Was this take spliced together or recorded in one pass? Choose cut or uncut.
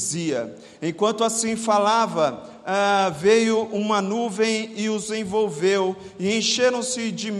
uncut